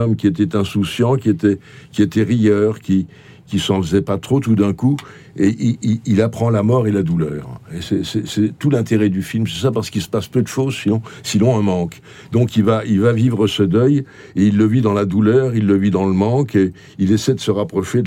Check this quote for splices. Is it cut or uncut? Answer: uncut